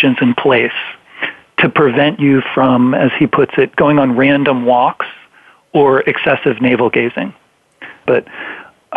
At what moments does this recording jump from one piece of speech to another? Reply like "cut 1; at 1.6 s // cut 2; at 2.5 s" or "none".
cut 1; at 8.1 s